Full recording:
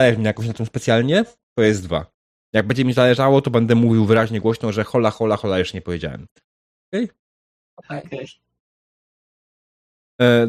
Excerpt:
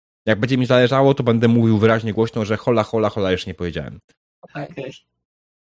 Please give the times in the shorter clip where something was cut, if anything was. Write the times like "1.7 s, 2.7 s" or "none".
4.3 s

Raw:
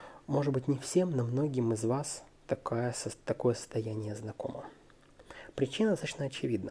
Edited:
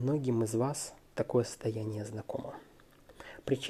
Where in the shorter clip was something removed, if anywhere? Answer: 1.1 s

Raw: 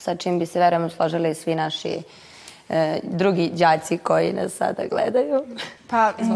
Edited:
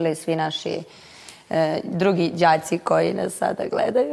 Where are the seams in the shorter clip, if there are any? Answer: none

